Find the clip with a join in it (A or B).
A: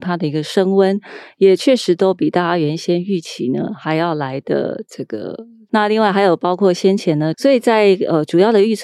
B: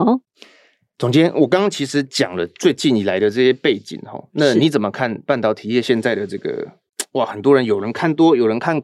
A